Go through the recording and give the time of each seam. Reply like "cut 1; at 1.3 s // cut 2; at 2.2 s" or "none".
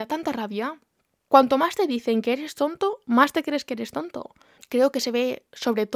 cut 1; at 1.2 s // cut 2; at 4.6 s